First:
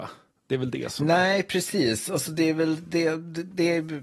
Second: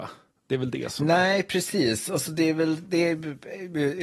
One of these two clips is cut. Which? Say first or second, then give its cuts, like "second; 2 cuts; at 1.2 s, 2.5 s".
second; 1 cut; at 2.8 s